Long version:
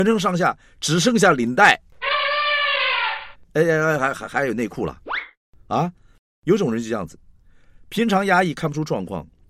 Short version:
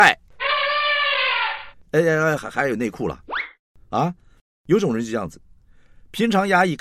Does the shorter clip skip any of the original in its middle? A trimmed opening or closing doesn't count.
yes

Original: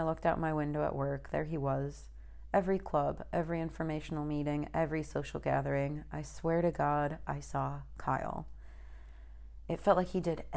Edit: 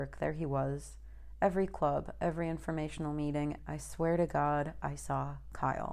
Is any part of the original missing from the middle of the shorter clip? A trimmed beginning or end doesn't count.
yes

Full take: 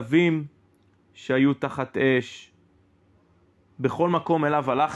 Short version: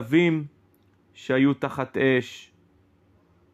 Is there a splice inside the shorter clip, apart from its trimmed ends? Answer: no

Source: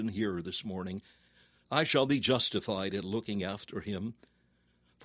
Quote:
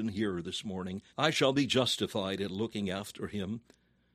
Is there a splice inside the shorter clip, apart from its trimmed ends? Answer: yes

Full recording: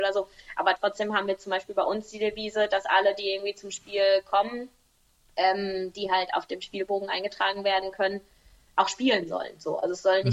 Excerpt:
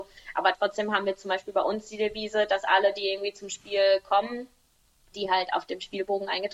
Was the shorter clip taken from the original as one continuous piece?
no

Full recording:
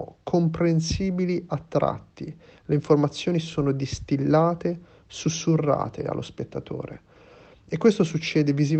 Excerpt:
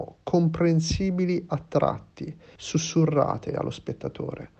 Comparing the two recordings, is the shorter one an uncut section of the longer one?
no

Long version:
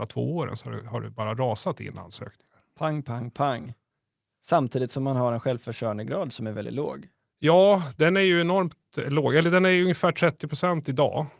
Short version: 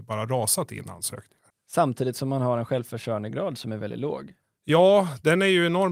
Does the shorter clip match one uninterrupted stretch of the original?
no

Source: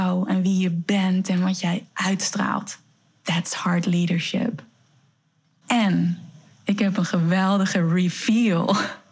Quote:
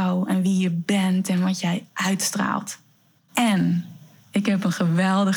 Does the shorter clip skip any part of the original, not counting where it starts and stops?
yes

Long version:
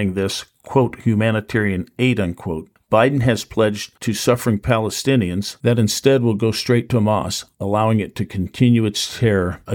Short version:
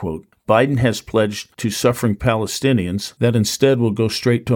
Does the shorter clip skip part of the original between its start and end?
no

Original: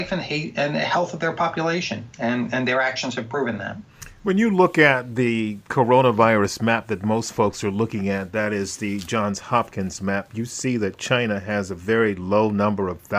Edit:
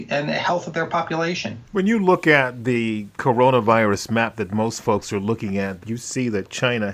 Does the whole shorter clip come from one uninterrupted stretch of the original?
no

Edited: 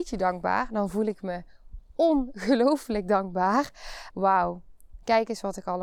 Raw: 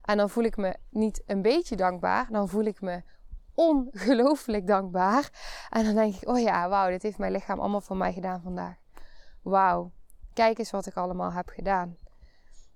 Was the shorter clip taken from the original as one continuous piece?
no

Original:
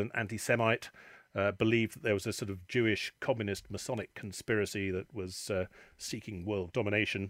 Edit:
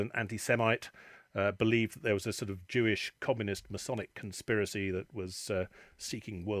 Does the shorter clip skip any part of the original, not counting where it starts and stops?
no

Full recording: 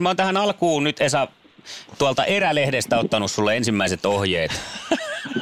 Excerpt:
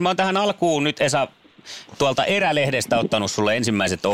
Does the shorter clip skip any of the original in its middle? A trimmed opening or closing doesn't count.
no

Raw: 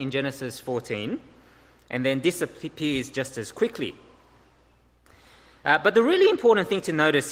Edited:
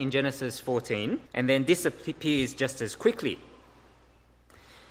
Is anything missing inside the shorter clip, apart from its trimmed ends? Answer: yes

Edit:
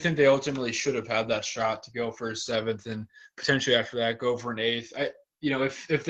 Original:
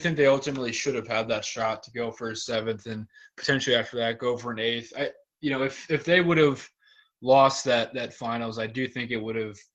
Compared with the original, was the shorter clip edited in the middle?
no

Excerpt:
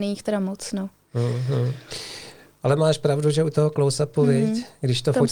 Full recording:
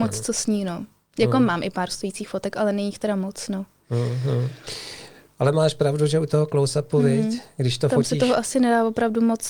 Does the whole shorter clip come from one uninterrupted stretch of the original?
yes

